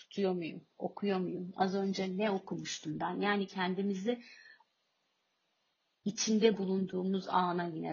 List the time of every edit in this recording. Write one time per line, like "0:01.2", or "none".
0:01.5